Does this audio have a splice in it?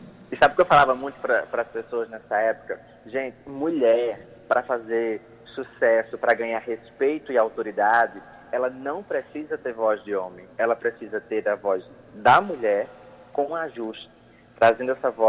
yes; 1 cut; at 13.5 s

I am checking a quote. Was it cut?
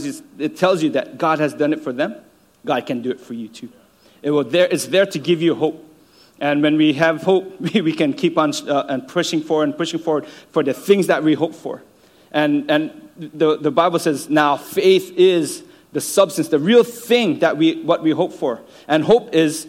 no; 0 cuts

